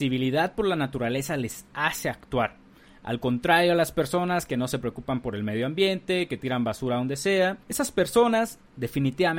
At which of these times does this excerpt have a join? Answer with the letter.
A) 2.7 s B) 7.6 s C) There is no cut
B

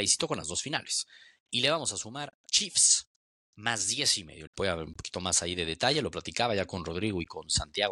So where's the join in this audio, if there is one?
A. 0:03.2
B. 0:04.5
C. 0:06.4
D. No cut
B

